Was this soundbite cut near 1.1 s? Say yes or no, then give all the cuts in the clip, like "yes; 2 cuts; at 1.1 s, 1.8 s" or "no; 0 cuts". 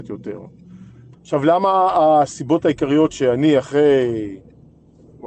yes; 1 cut; at 1.1 s